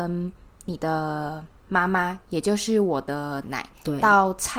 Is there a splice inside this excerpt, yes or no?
yes